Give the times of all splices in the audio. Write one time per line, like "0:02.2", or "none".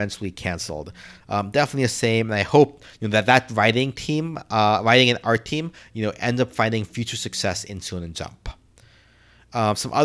none